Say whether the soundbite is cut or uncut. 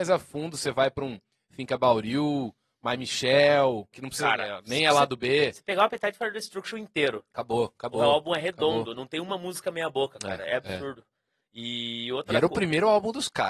cut